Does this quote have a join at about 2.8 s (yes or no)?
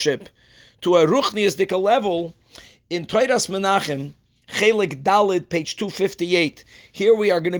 no